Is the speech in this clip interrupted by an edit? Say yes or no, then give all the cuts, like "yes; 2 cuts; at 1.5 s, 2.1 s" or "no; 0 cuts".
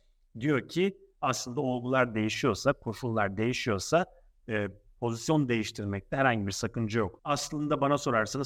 yes; 1 cut; at 7.2 s